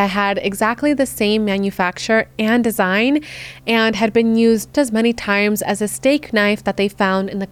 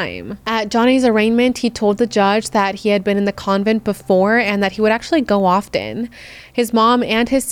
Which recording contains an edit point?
first; 1 cut; at 4.7 s

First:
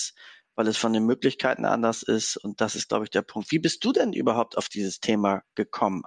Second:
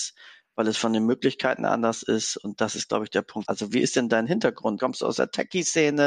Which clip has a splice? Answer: second; 2 cuts; at 3.4 s, 4.8 s

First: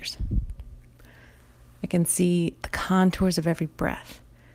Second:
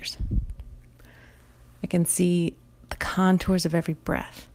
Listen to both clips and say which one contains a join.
first; 1 cut; at 2.6 s

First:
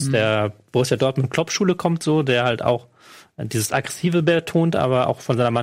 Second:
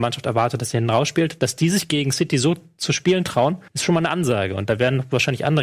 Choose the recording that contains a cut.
second; 1 cut; at 3.7 s

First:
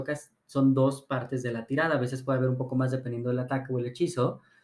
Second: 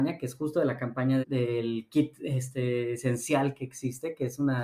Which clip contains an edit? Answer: second; 1 cut; at 1.2 s

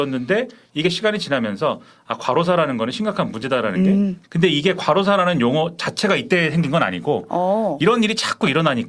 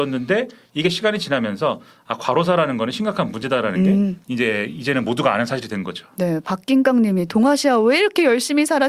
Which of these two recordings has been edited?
first; 1 cut; at 4.2 s

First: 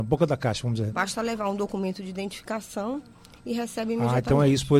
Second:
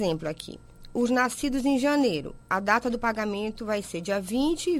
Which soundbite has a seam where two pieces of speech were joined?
first; 1 cut; at 0.9 s

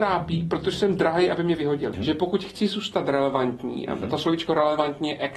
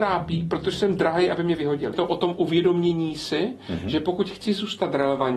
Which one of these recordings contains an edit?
first; 1 cut; at 1.9 s

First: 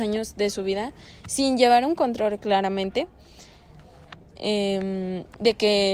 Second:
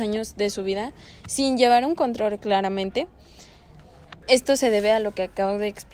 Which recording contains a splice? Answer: second; 1 cut; at 4.2 s

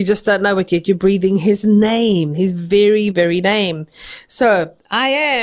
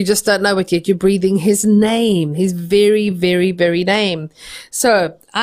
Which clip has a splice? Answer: first; 1 cut; at 3.1 s

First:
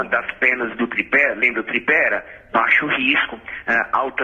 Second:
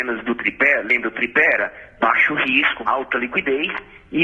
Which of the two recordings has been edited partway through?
second; 1 cut; at 2.8 s

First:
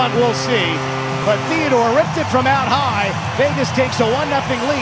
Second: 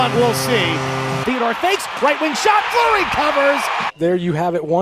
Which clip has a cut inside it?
second; 3 cuts; at 1.2 s, 2.7 s, 3.9 s

